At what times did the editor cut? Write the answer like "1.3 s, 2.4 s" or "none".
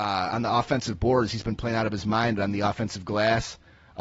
none